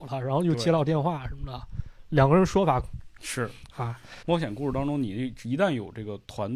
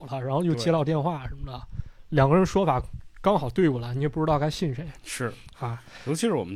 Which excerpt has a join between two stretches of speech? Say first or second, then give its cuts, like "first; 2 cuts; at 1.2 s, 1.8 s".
first; 2 cuts; at 3.2 s, 4.2 s